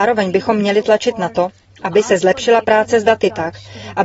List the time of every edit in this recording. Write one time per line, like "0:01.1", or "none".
none